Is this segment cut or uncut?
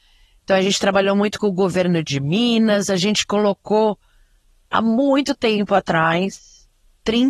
uncut